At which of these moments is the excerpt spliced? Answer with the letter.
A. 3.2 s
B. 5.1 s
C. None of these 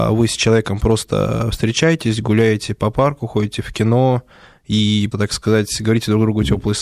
B